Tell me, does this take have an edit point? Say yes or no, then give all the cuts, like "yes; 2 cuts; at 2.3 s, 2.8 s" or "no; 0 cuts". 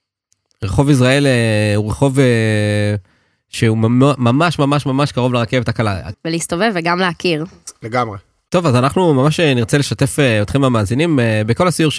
yes; 1 cut; at 6.1 s